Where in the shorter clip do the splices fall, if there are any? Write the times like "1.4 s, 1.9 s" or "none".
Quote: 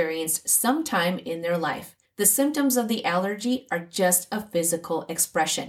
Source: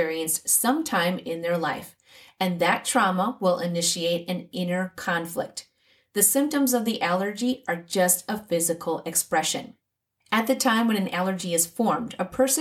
2.1 s

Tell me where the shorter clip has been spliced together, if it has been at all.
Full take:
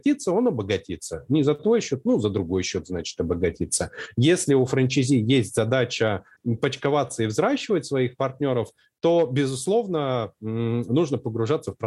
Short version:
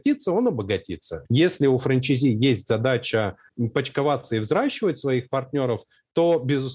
1.3 s

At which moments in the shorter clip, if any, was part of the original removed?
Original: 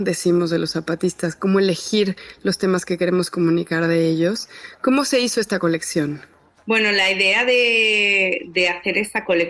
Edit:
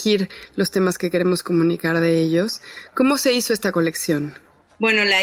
none

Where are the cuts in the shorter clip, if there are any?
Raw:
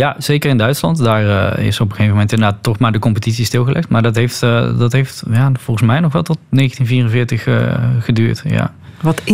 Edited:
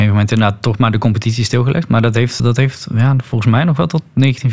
2.4 s

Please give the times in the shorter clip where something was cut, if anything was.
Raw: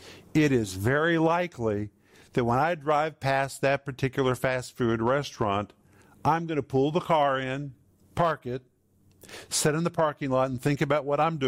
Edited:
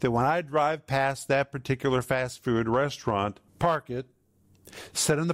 3.5 s

